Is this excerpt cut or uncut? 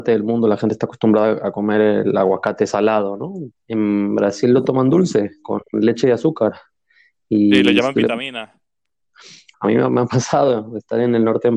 cut